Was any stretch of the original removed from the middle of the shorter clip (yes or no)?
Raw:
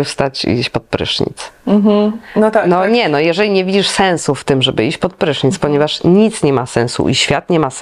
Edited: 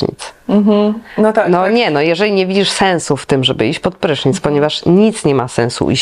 no